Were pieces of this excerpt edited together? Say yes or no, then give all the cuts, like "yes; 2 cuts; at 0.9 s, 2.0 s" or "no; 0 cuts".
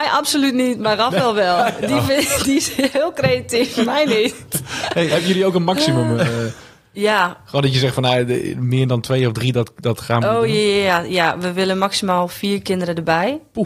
no; 0 cuts